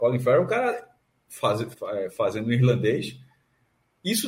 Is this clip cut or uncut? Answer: cut